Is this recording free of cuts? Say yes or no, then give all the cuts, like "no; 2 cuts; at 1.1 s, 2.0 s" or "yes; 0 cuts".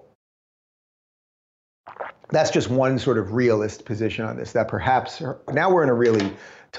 no; 1 cut; at 5.5 s